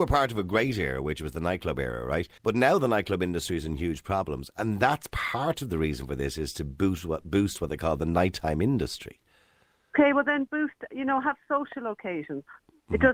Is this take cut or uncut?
cut